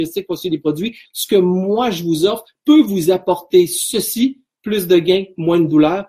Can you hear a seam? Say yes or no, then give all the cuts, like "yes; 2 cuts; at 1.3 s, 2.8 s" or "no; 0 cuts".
yes; 1 cut; at 1.0 s